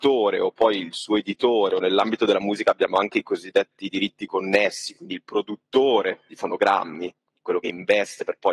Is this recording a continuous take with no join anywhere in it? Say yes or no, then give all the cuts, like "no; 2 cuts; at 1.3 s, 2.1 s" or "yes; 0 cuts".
yes; 0 cuts